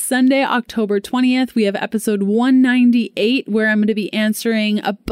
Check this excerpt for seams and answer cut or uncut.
uncut